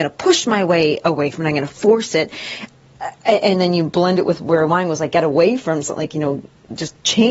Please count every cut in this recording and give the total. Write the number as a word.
zero